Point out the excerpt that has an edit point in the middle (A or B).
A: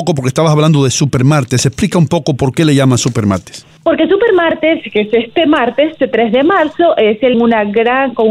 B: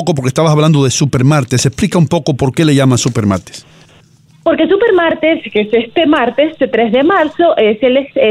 A